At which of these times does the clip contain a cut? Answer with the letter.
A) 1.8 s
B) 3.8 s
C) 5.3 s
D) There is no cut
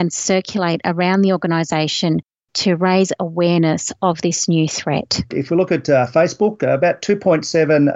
C